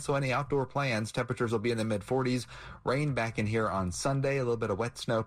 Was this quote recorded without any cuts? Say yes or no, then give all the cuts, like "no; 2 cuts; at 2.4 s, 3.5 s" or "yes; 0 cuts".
yes; 0 cuts